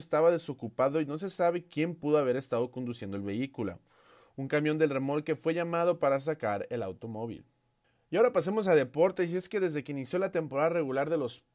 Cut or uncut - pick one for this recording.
uncut